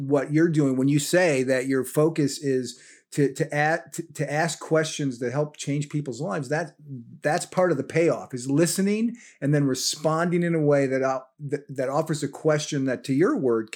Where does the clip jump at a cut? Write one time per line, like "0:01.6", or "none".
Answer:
none